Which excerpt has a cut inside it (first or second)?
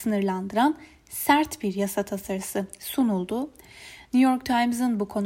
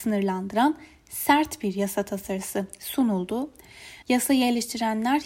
second